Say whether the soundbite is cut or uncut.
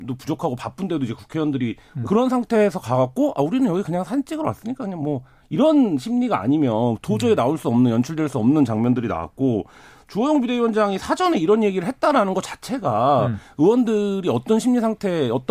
cut